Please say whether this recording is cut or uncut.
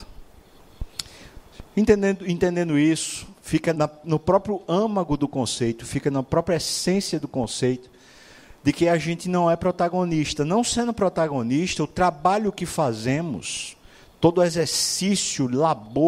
cut